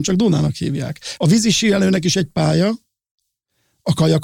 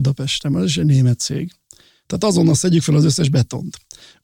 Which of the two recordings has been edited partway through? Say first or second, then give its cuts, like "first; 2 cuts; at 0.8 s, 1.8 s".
first; 1 cut; at 1.2 s